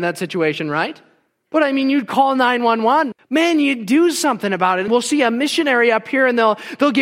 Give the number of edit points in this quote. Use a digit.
1